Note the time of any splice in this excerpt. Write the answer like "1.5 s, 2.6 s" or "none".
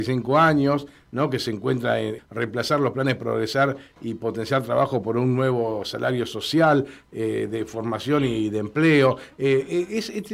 2.2 s